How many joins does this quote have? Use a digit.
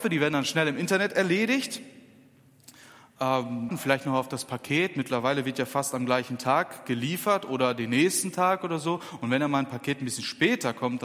1